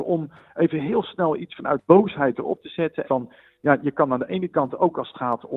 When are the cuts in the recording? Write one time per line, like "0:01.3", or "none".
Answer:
0:03.0